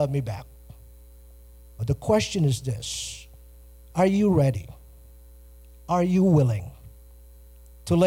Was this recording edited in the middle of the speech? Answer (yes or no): yes